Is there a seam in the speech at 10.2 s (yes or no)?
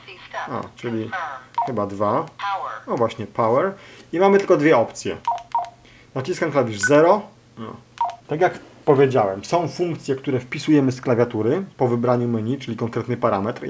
no